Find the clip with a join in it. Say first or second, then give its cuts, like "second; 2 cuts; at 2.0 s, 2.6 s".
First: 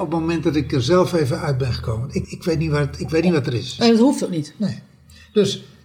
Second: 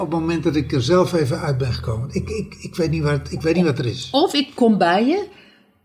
first; 2 cuts; at 2.2 s, 3.8 s